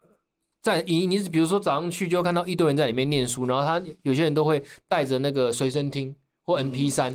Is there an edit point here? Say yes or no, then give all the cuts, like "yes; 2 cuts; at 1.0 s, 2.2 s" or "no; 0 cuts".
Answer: no; 0 cuts